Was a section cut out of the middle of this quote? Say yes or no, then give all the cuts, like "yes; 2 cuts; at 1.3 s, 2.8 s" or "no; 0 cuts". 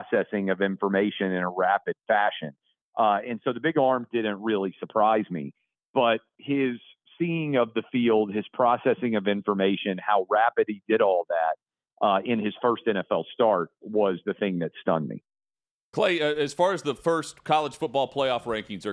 yes; 1 cut; at 2.8 s